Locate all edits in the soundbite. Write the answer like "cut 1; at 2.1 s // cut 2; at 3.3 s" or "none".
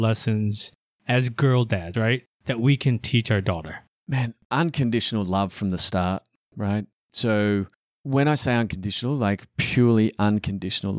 cut 1; at 1.9 s